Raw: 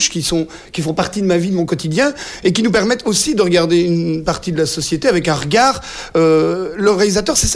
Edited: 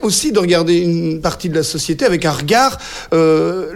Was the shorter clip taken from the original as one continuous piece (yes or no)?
yes